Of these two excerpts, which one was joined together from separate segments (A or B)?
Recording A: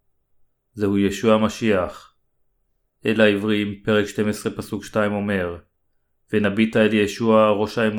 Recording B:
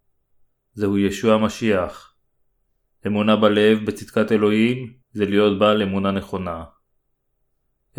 B